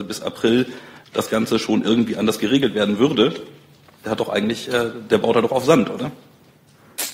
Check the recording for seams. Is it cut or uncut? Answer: uncut